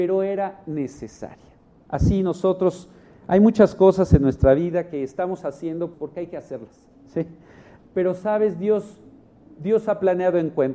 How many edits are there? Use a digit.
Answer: 2